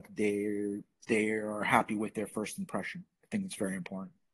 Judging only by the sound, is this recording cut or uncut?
uncut